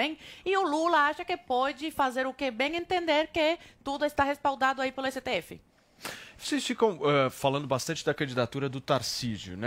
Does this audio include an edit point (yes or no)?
no